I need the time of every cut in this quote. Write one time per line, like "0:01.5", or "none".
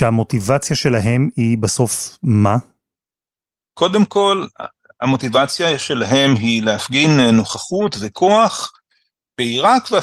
none